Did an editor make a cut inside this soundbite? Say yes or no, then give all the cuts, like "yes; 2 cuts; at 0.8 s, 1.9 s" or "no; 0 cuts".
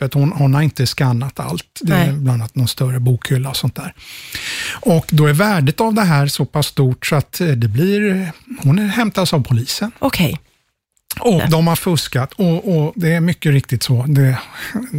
yes; 2 cuts; at 11.4 s, 12.9 s